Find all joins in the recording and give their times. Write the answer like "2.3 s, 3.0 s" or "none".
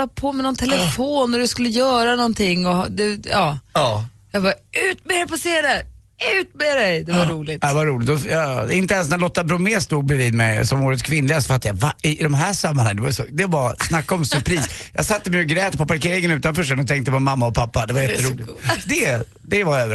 none